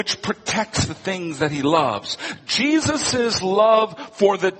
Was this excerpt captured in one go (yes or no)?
yes